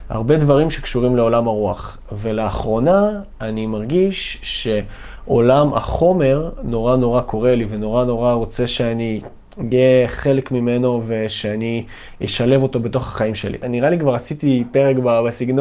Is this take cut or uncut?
uncut